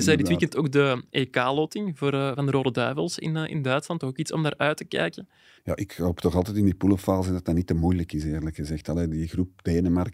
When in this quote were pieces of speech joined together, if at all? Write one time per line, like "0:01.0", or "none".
0:05.6